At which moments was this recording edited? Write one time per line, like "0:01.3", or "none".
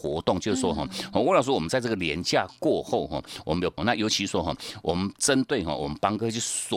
0:03.8